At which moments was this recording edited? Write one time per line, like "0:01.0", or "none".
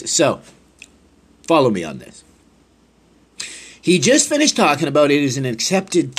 none